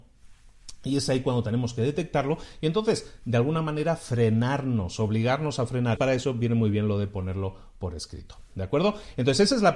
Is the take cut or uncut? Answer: cut